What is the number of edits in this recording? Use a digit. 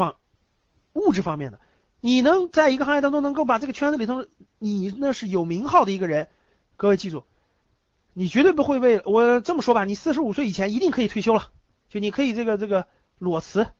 0